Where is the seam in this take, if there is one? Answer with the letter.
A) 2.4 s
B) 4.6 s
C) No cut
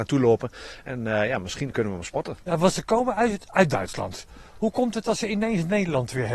A